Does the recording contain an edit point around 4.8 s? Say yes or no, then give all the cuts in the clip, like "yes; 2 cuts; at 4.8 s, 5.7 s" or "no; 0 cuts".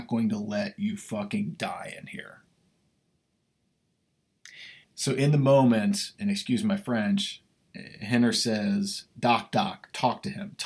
yes; 1 cut; at 4.8 s